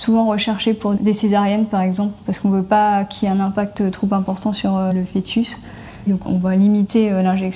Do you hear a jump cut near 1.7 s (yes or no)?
no